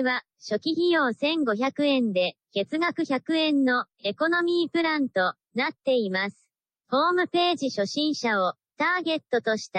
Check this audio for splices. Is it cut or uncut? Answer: cut